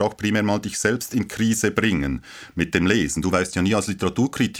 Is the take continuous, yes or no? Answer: yes